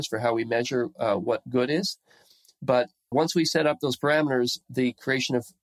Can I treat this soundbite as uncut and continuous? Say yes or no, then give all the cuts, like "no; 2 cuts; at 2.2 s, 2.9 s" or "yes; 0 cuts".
no; 2 cuts; at 3.1 s, 4.6 s